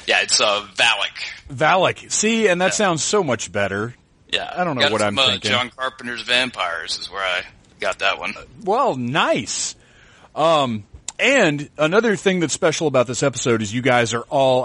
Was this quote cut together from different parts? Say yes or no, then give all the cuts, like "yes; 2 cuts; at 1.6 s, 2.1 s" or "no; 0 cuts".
no; 0 cuts